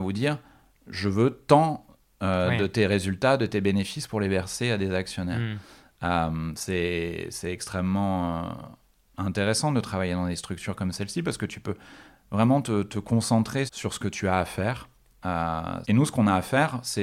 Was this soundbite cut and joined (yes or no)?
yes